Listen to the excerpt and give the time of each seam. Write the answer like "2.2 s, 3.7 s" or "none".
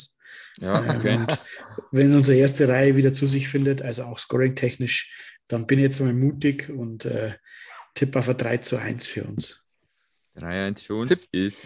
none